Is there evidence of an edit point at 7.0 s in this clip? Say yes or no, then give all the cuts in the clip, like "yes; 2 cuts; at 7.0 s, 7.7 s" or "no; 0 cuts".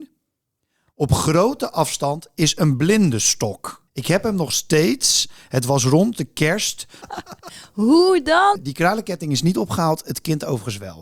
yes; 3 cuts; at 3.9 s, 7.0 s, 8.6 s